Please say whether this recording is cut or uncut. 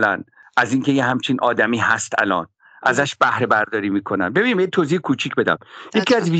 uncut